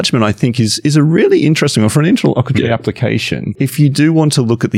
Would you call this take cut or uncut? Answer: uncut